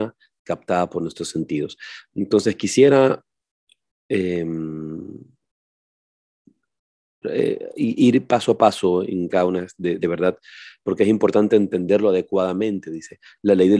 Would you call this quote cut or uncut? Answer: cut